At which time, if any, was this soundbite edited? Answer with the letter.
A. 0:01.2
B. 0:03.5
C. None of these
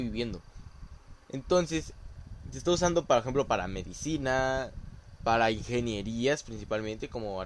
A